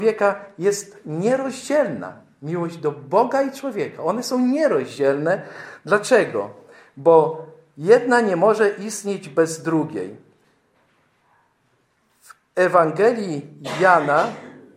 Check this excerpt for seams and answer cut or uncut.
uncut